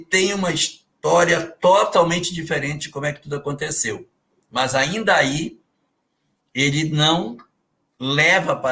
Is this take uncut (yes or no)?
yes